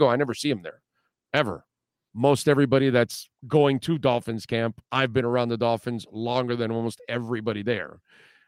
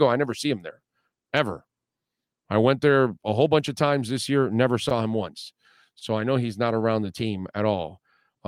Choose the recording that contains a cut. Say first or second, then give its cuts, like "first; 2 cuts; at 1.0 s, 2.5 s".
first; 2 cuts; at 2.1 s, 3.4 s